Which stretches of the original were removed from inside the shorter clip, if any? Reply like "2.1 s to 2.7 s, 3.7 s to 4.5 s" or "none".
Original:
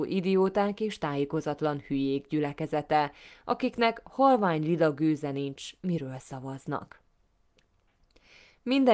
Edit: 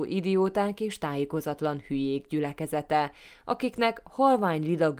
none